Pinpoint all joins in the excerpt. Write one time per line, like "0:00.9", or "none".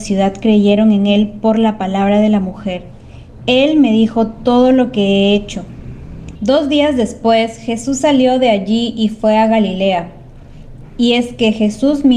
0:03.4
0:06.4